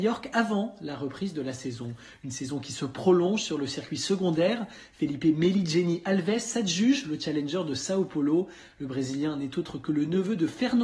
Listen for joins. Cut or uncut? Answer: uncut